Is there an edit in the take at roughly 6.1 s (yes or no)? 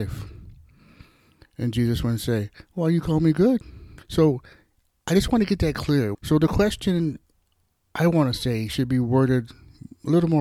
yes